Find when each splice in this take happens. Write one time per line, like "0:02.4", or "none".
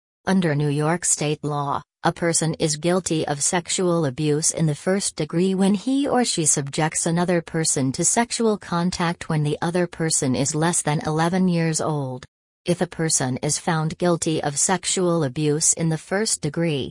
none